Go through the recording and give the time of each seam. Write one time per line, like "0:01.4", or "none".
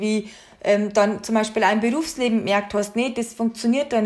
none